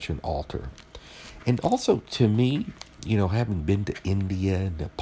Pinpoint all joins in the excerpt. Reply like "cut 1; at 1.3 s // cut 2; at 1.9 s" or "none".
none